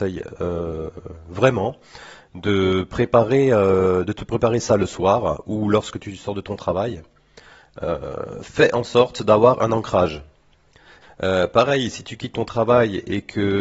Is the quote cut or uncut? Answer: cut